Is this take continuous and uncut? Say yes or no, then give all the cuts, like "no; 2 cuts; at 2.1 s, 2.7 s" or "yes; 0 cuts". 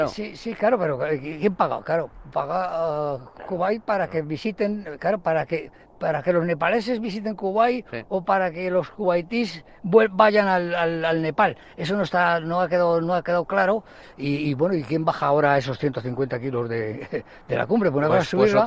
yes; 0 cuts